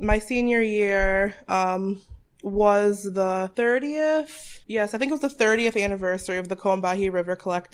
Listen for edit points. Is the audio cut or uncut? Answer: cut